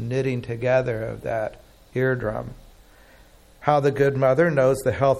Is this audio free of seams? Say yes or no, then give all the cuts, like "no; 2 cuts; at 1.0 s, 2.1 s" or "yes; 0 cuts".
yes; 0 cuts